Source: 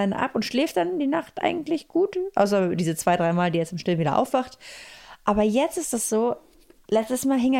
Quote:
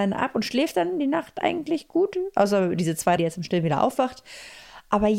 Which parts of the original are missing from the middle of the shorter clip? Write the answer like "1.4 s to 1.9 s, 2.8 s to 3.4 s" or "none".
3.2 s to 3.5 s